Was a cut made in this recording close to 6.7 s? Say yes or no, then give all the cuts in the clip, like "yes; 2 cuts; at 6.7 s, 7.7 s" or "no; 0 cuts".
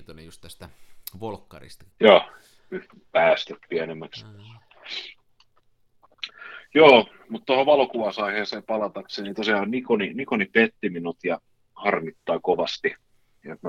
no; 1 cut; at 1.9 s